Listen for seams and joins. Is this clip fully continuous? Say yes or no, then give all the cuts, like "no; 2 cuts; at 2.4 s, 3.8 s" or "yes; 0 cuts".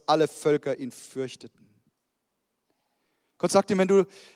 yes; 0 cuts